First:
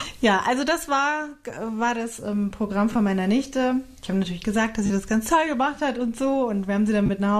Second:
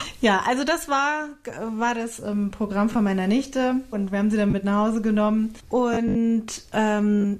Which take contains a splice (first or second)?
second